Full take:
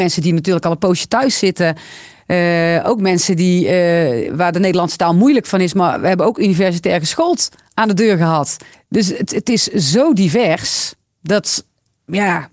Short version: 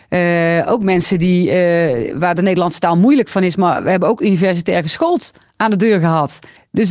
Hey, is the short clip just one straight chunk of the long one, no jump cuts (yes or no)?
yes